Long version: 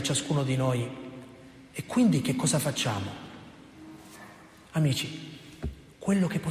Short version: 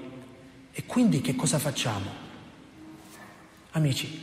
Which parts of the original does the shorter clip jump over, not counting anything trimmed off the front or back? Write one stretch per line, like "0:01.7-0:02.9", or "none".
none

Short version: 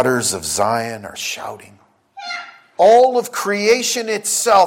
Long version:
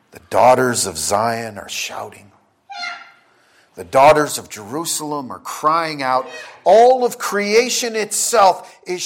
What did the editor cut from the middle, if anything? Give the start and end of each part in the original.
0:03.3-0:06.6

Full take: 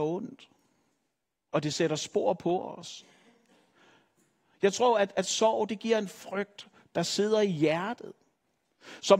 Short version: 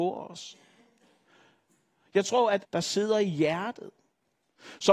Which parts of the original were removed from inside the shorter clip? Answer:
0:05.1-0:06.9

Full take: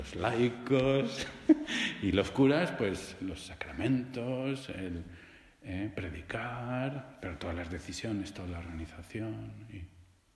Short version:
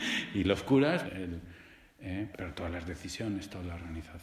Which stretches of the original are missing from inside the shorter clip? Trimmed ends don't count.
0:02.7-0:04.7
0:05.9-0:07.2

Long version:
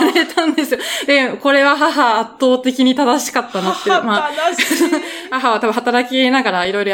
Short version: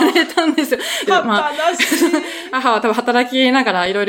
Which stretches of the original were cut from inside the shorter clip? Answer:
0:01.1-0:03.8

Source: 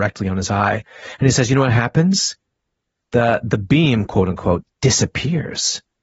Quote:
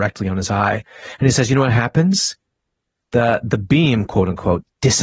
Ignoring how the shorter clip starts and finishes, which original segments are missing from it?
none

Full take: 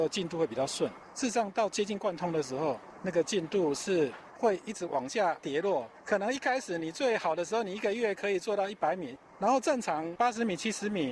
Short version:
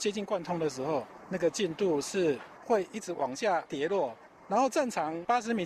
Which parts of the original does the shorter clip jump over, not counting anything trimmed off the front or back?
0:06.0-0:09.2

